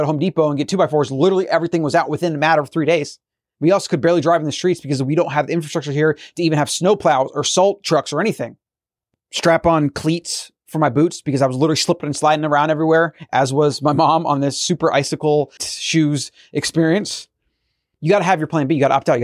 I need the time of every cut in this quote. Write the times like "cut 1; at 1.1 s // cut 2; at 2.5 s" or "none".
cut 1; at 15.6 s